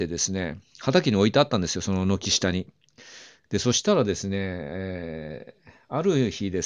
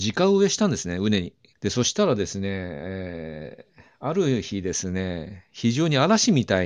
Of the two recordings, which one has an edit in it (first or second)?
second